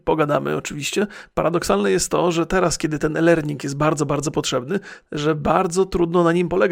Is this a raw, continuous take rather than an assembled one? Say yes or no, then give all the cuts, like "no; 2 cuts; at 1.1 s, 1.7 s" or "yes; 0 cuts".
no; 1 cut; at 5.0 s